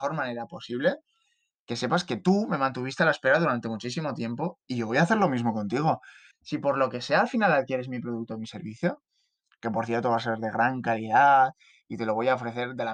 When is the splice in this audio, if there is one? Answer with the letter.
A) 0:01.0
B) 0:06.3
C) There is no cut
B